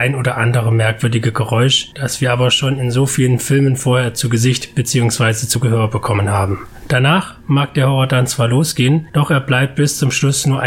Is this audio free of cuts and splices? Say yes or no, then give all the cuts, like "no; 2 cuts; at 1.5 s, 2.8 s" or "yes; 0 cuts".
yes; 0 cuts